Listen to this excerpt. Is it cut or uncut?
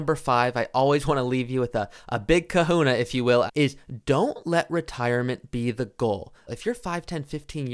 cut